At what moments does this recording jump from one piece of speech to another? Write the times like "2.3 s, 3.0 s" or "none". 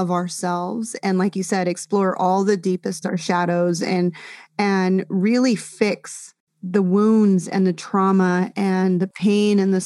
3.0 s